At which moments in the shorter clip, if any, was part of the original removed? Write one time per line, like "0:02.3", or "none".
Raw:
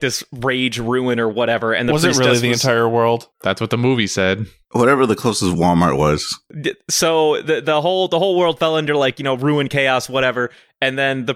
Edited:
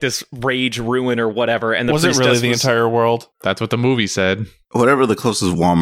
none